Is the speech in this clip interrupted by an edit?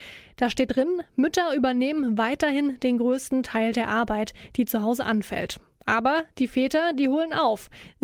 no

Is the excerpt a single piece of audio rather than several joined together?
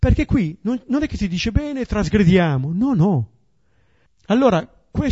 no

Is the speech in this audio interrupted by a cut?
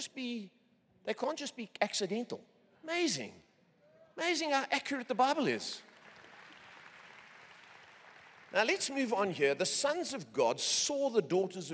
yes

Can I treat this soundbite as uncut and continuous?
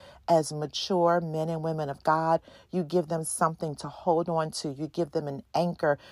yes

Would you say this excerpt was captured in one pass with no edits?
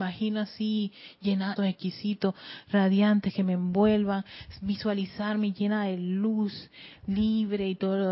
no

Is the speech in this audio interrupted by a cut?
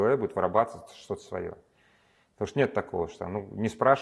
no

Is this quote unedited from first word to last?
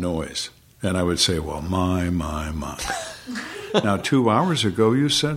yes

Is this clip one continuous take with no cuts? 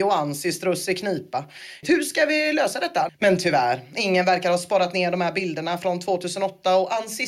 no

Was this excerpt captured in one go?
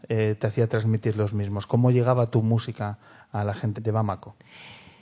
no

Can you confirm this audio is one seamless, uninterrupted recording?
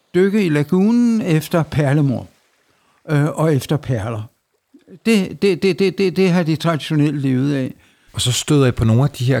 no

